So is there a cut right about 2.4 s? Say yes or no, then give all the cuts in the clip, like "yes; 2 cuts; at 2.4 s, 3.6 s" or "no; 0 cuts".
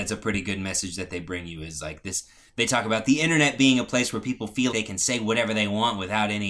no; 1 cut; at 4.7 s